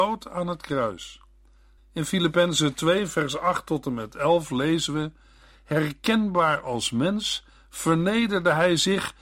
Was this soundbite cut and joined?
yes; 1 cut; at 1.8 s

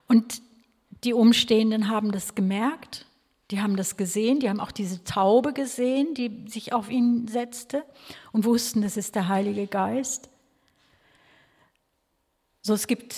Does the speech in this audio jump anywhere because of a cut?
no; 0 cuts

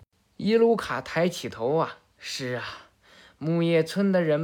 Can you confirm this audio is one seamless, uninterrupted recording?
yes; 0 cuts

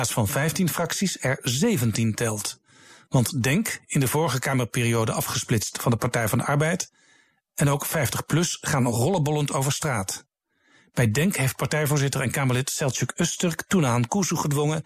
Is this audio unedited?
yes; 0 cuts

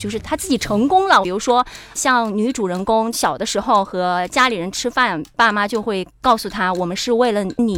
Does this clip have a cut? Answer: yes; 1 cut; at 1.2 s

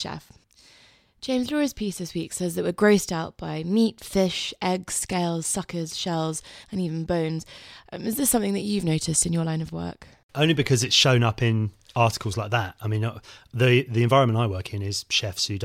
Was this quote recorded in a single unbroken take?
yes; 0 cuts

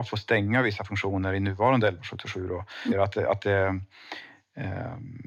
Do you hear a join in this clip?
yes; 1 cut; at 2.9 s

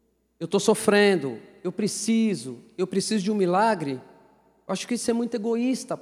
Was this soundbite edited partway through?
no; 0 cuts

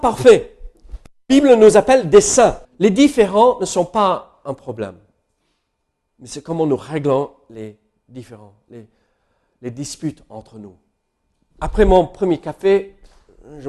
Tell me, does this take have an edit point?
yes; 2 cuts; at 2.6 s, 11.5 s

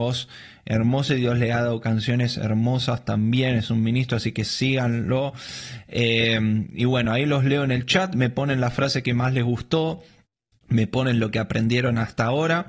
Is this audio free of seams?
yes; 0 cuts

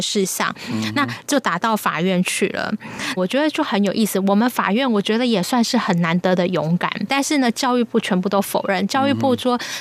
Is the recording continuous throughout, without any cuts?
no; 2 cuts; at 3.2 s, 7.1 s

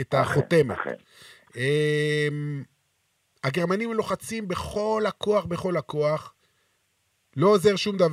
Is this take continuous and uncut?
yes; 0 cuts

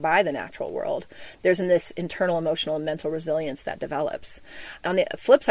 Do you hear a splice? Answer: no; 0 cuts

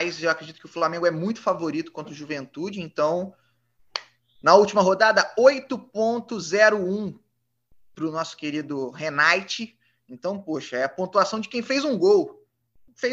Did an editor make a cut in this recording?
no; 0 cuts

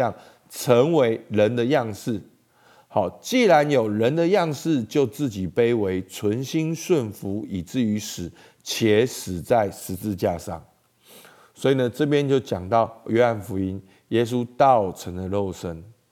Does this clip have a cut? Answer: no; 0 cuts

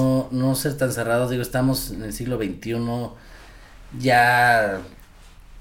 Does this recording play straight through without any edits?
yes; 0 cuts

